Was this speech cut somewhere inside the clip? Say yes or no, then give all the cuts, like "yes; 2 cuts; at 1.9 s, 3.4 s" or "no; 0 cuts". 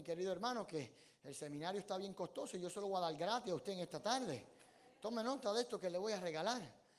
no; 0 cuts